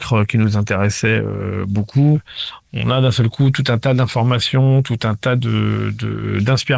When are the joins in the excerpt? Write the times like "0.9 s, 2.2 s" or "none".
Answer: none